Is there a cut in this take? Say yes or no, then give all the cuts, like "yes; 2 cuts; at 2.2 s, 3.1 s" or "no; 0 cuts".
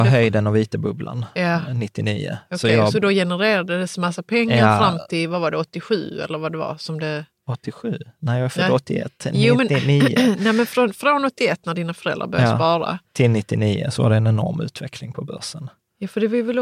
no; 0 cuts